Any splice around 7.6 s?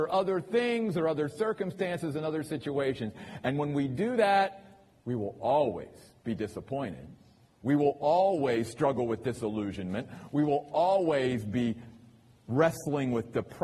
yes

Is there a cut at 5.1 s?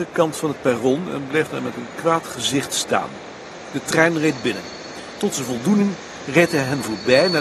no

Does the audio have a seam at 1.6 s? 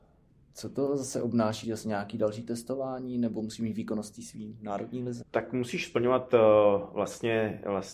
yes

